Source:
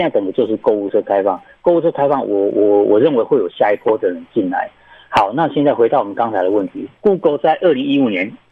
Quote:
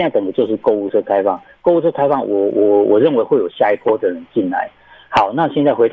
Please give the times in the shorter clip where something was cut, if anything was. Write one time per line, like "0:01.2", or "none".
none